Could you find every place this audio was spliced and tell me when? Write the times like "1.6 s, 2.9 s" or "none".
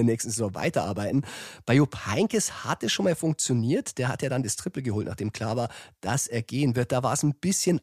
none